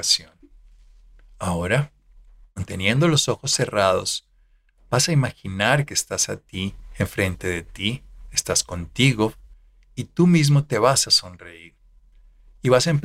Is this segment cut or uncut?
uncut